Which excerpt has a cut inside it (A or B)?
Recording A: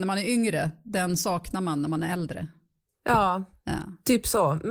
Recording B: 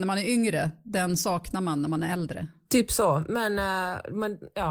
B